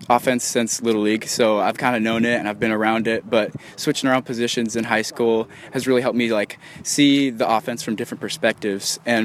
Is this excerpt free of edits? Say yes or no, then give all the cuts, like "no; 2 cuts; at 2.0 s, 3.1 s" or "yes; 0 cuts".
yes; 0 cuts